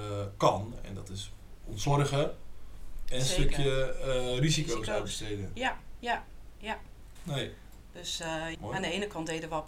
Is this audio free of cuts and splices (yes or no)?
no